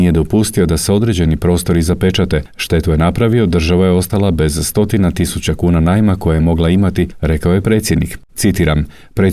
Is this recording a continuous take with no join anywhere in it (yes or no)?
no